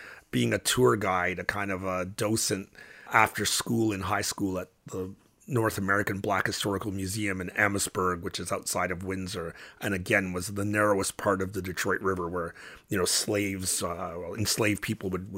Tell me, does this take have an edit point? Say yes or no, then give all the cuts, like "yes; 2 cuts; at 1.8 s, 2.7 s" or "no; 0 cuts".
no; 0 cuts